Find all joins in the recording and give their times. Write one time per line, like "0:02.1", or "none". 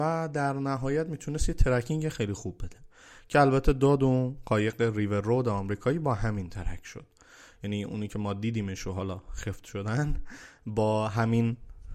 none